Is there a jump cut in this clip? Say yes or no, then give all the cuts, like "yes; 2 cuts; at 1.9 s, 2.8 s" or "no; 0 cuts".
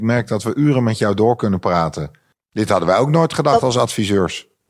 yes; 1 cut; at 2.3 s